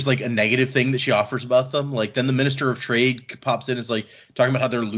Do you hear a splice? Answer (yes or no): no